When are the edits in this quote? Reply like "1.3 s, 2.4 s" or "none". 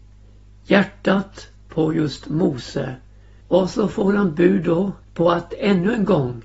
3.4 s, 5.0 s